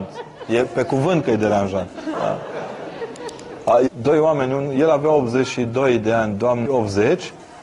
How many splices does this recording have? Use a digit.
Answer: 3